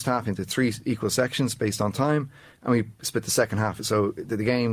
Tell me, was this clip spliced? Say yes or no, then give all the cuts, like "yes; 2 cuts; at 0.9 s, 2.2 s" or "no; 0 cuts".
no; 0 cuts